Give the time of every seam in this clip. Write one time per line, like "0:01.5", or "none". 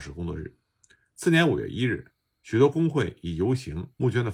none